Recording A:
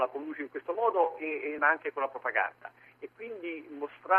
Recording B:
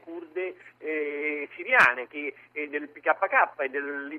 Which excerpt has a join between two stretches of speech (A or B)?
A